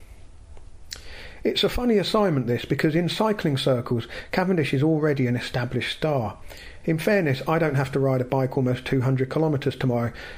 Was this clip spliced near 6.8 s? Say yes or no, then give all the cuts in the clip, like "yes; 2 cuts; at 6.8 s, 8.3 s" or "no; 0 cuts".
yes; 1 cut; at 6.8 s